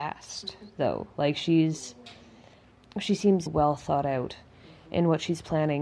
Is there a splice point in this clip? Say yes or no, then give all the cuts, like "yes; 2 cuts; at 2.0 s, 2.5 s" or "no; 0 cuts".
yes; 1 cut; at 3.5 s